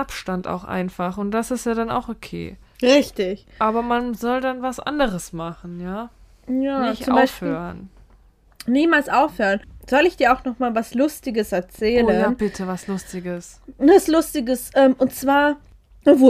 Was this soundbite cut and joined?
no; 0 cuts

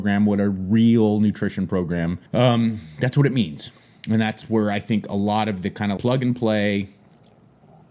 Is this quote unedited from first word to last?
no; 2 cuts; at 2.3 s, 6.0 s

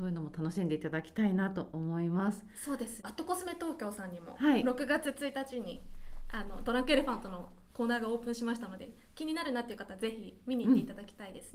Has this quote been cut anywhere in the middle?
no; 0 cuts

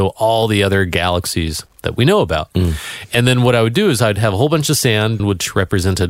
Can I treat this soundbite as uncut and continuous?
no; 1 cut; at 5.2 s

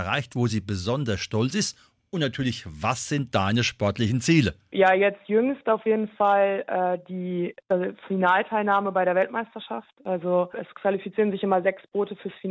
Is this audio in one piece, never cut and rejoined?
no; 1 cut; at 7.6 s

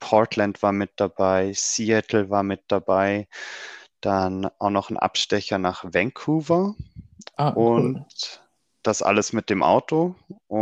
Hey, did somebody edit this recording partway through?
no; 0 cuts

